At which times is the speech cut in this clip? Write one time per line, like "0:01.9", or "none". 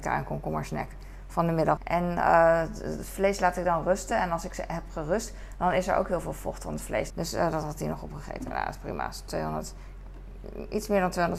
0:01.8
0:07.1